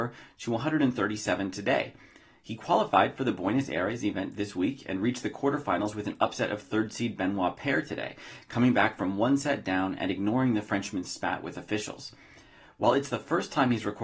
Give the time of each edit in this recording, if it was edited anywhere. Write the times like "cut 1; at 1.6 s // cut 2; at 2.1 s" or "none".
none